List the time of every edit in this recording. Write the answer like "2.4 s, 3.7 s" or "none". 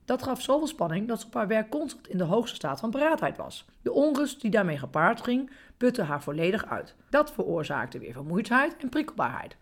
3.7 s, 7.1 s